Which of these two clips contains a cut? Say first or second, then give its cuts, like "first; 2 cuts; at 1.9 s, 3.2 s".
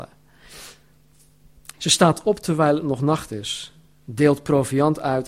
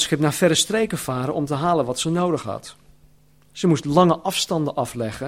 first; 1 cut; at 1.7 s